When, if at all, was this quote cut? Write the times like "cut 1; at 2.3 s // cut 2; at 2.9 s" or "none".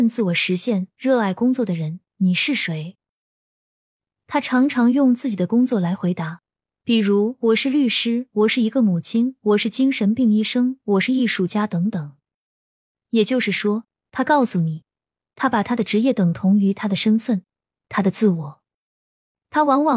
none